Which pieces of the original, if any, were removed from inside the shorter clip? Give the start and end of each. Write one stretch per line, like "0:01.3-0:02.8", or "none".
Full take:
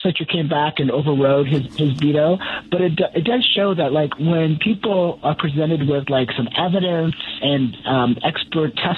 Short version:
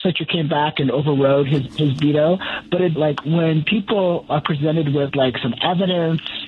0:03.0-0:03.9